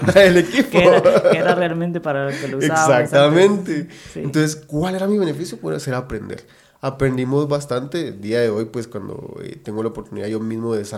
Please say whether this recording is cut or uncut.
uncut